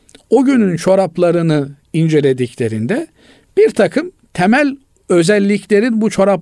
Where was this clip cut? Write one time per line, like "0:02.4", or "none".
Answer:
none